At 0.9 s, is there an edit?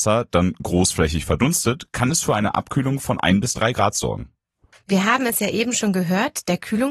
no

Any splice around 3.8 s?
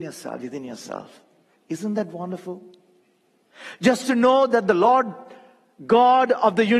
no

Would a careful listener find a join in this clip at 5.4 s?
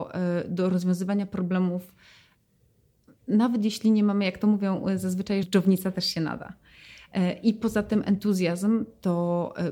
yes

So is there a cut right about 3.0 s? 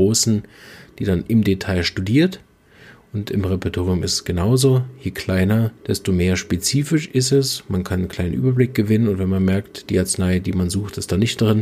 no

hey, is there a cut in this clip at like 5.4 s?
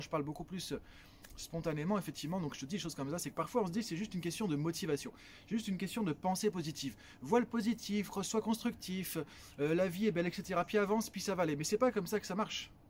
no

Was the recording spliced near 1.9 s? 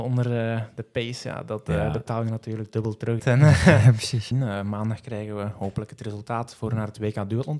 no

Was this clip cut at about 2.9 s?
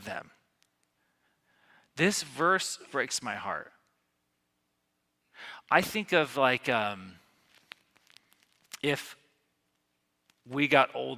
yes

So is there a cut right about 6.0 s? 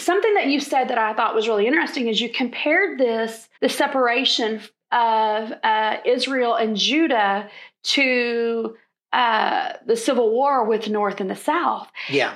no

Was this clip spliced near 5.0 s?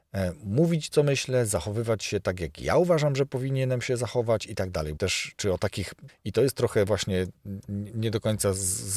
yes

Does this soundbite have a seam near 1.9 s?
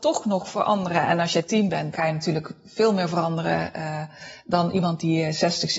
yes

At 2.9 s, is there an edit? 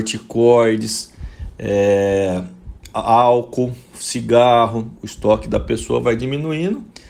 no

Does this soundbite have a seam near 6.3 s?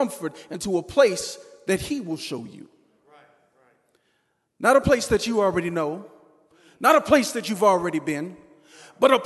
no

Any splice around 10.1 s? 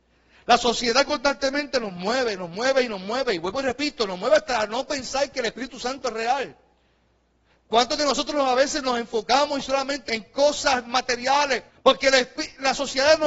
yes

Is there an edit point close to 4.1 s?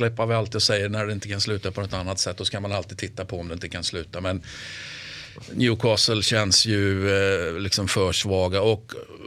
no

